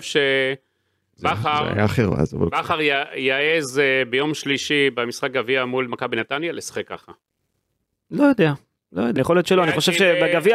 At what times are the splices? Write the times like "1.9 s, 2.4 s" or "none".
9.2 s